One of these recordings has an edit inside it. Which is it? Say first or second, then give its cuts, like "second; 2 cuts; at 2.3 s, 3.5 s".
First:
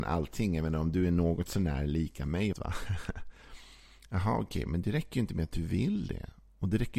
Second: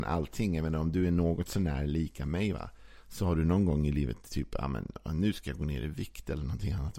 first; 1 cut; at 2.5 s